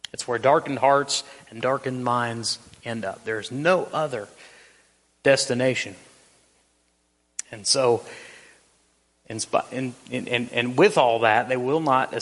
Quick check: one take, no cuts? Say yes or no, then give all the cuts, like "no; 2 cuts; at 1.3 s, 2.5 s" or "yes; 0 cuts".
yes; 0 cuts